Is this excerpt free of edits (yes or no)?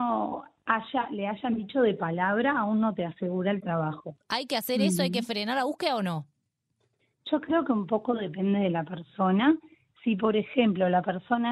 no